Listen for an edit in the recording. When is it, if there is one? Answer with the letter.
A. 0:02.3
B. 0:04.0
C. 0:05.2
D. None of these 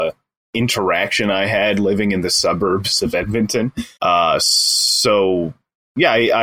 B